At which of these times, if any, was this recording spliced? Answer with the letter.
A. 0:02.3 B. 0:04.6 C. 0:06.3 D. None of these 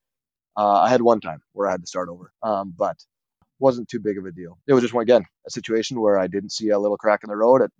A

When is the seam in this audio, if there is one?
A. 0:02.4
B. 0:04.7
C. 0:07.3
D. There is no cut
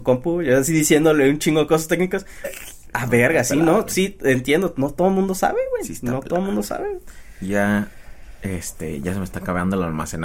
A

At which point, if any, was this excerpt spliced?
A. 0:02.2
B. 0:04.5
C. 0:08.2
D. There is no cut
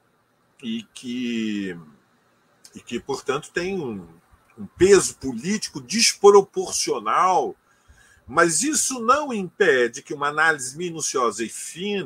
D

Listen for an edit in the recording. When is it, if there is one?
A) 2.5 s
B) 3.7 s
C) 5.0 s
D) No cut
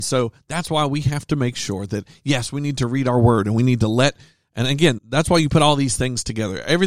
C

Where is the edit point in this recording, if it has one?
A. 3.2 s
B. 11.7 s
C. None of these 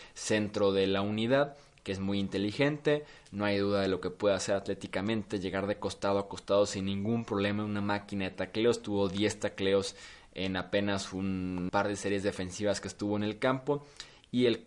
B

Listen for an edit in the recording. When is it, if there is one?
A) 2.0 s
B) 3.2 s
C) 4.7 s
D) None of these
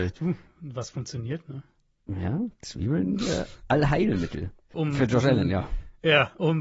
C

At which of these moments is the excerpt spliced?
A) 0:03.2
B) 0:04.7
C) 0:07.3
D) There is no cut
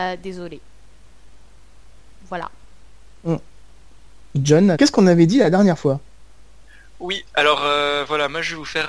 B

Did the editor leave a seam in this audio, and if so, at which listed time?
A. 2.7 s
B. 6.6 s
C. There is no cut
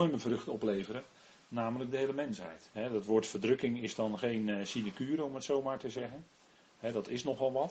A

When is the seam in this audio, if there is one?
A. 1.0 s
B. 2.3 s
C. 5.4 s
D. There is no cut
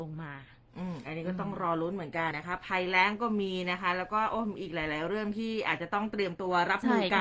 B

